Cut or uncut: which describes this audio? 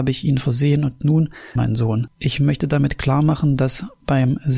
cut